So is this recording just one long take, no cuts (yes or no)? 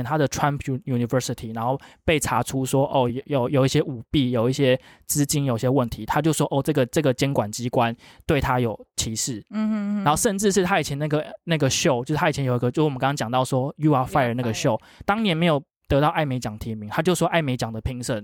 yes